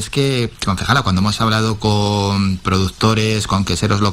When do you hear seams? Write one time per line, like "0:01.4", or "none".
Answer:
none